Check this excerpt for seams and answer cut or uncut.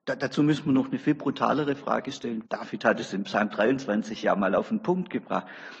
cut